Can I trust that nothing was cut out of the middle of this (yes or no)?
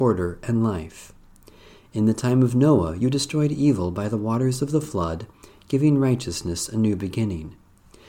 yes